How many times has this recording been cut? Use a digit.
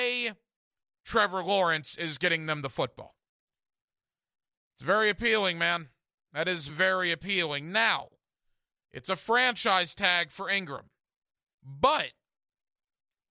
2